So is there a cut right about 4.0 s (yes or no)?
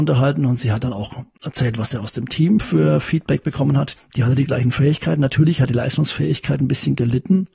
yes